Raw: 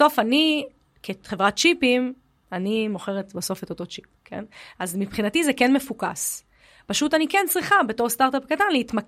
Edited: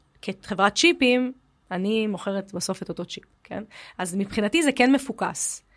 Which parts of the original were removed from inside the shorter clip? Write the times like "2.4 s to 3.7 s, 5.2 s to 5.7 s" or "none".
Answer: none